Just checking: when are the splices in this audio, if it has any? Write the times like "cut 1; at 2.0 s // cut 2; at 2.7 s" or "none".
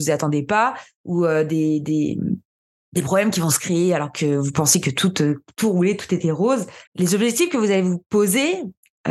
cut 1; at 6.9 s